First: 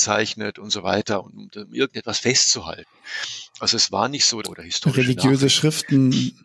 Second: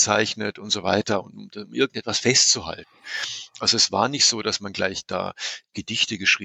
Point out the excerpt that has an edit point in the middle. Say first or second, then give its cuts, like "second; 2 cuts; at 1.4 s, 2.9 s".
first; 1 cut; at 4.4 s